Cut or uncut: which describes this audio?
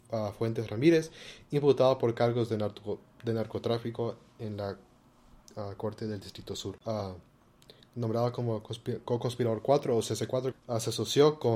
cut